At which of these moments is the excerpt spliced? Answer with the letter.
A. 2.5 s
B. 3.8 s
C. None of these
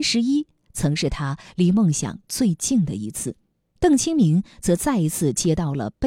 B